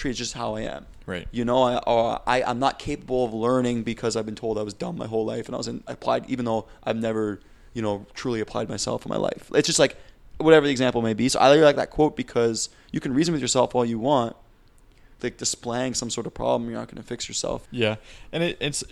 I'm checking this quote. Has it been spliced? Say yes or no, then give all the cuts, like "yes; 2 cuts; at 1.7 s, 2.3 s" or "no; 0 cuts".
yes; 2 cuts; at 15.2 s, 17.6 s